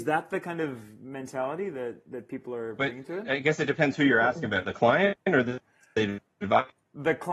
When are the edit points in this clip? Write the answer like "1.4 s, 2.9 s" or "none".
none